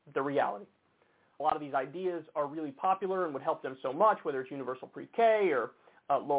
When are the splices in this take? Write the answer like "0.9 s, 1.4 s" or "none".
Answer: 1.4 s